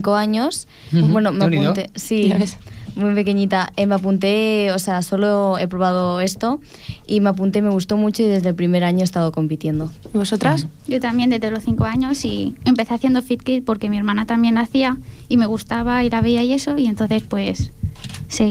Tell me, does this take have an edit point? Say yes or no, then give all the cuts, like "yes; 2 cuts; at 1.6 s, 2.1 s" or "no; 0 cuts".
no; 0 cuts